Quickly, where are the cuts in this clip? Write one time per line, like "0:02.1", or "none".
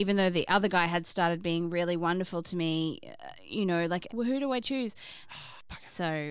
0:04.1
0:05.2